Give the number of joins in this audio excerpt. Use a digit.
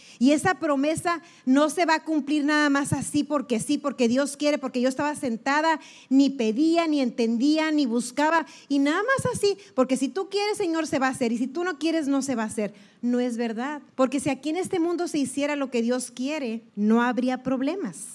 2